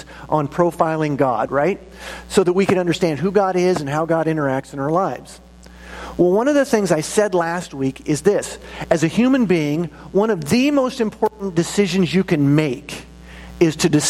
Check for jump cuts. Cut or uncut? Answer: cut